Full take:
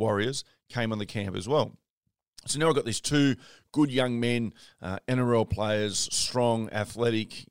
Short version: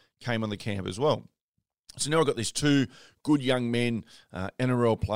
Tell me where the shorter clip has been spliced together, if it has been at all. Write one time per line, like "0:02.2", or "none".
none